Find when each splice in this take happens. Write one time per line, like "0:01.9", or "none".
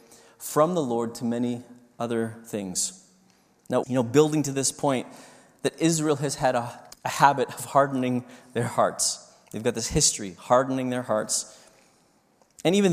0:03.8
0:06.9